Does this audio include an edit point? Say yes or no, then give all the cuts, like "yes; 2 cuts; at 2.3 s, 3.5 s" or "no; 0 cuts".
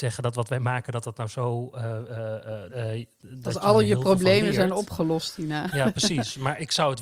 yes; 1 cut; at 2.7 s